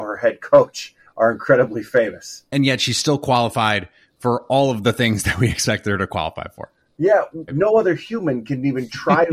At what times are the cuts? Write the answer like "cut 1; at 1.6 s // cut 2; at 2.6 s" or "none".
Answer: cut 1; at 2.5 s // cut 2; at 7.5 s